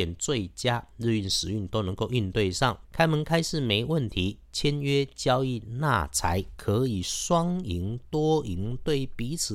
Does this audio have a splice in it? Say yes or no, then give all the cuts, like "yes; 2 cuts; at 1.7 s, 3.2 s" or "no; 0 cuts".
yes; 1 cut; at 2.8 s